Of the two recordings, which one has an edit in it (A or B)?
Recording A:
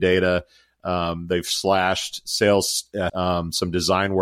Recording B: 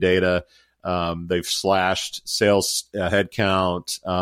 A